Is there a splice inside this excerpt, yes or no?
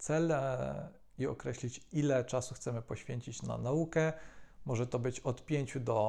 no